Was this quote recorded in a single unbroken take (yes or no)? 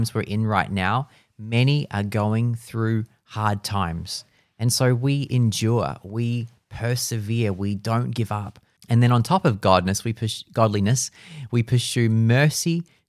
no